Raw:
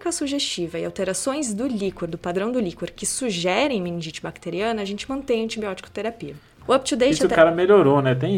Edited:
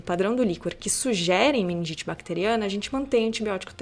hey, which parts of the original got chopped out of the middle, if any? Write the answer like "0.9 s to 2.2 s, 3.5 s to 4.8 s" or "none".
none